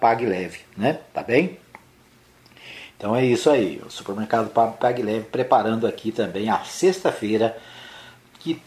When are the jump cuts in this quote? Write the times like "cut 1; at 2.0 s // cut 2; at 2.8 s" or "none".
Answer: none